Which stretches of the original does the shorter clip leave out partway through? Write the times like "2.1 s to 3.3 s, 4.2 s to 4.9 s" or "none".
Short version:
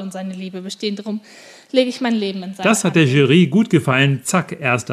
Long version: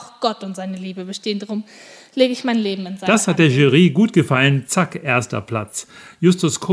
none